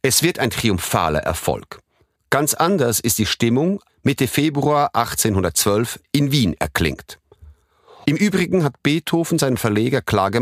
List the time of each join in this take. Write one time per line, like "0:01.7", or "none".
0:03.9
0:08.0